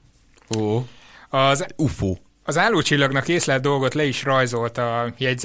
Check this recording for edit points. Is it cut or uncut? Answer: uncut